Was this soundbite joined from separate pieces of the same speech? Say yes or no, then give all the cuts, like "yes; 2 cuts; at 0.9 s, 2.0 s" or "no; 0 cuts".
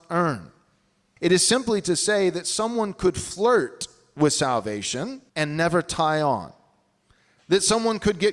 yes; 2 cuts; at 1.2 s, 5.3 s